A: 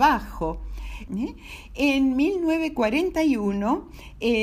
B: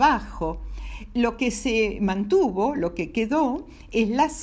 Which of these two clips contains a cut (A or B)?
A